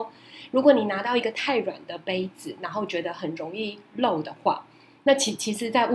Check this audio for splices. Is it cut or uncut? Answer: uncut